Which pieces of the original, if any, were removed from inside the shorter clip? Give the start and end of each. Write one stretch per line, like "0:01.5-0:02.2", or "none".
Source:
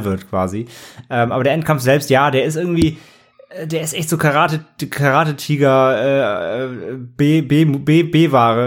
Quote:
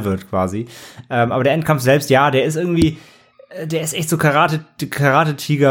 none